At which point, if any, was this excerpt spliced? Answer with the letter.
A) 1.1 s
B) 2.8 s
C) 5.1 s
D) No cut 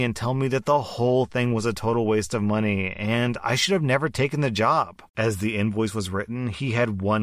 C